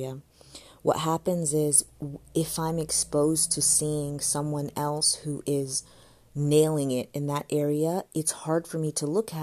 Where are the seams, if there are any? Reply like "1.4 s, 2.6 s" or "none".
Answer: none